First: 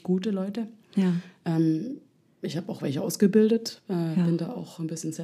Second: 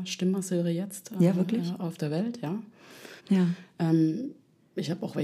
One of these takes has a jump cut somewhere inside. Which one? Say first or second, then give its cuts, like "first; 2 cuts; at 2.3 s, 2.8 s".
second; 1 cut; at 3.2 s